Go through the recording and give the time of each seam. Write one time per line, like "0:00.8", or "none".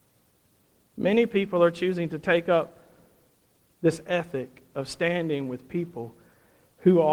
none